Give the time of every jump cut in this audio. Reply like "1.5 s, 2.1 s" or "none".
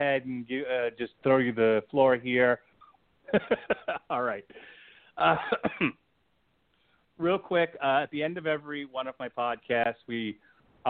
3.0 s